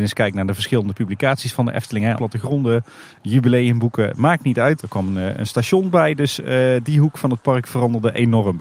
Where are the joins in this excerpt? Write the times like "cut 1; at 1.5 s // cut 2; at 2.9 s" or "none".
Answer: cut 1; at 2.2 s // cut 2; at 4.8 s